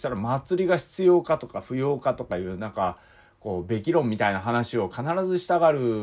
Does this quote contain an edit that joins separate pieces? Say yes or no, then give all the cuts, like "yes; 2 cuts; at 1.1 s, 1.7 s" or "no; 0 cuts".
no; 0 cuts